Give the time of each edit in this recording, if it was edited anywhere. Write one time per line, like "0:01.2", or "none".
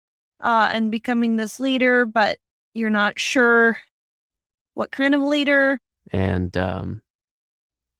0:06.0

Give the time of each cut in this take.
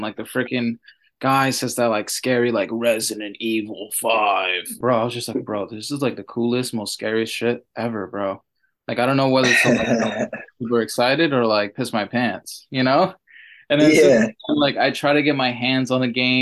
none

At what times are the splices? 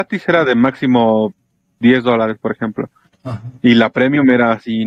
none

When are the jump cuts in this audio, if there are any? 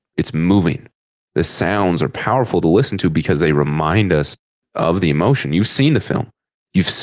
none

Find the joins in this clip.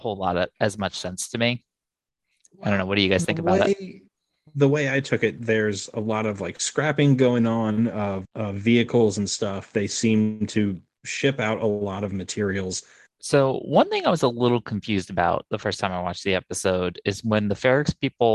0:08.2
0:13.1

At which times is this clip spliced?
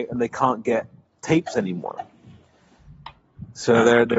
none

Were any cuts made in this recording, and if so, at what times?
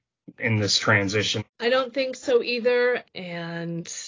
0:01.4
0:03.0

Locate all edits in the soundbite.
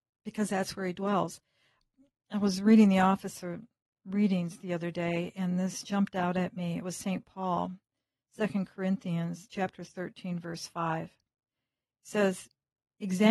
0:05.8

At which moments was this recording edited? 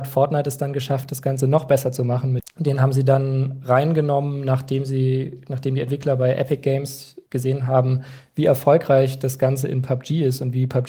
0:02.4
0:07.3

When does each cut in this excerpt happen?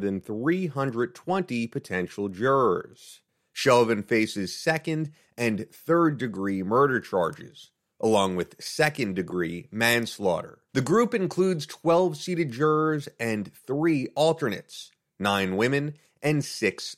0:10.7

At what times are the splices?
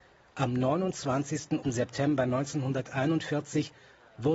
0:01.6

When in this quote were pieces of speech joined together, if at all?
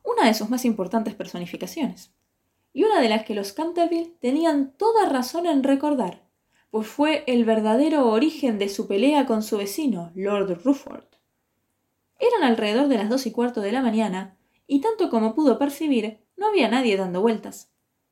none

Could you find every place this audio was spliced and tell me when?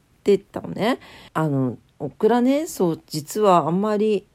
0:01.3

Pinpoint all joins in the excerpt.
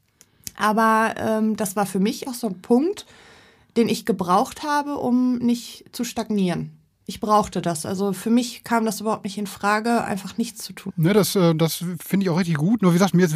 0:02.3
0:10.9

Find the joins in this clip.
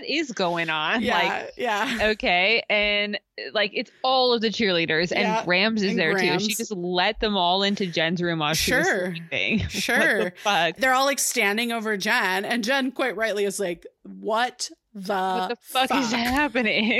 none

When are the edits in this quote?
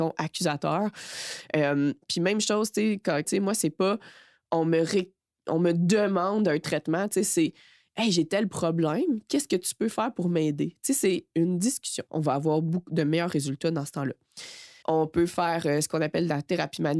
0:03.2
0:12.1
0:14.8

